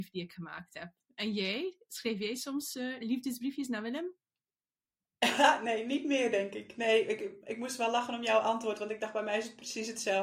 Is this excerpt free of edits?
yes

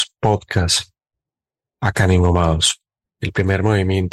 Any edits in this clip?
yes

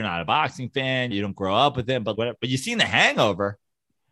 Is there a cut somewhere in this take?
yes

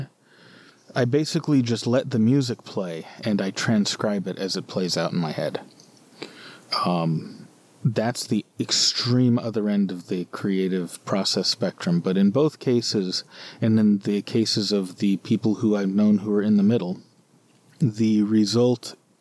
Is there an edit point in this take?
yes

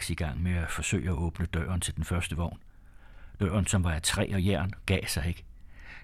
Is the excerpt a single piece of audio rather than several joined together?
yes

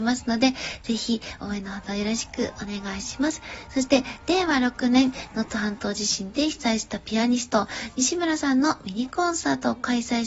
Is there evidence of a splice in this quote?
no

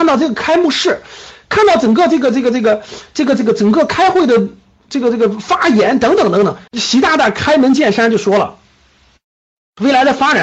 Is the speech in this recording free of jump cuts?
no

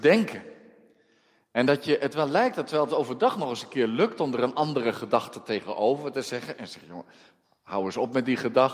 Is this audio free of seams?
yes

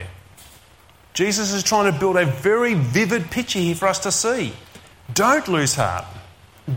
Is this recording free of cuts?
no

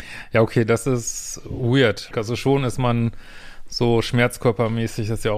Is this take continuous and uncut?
no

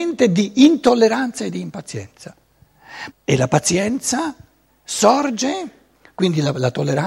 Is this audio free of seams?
no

